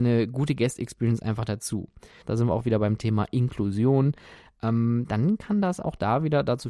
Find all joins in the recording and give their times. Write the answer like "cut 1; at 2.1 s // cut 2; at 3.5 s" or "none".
cut 1; at 2.2 s